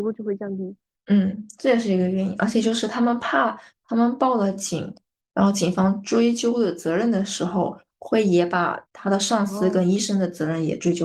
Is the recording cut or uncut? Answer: uncut